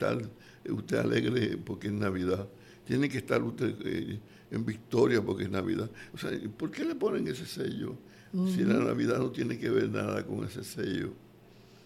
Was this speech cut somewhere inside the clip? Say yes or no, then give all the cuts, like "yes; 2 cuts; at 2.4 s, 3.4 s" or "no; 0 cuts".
no; 0 cuts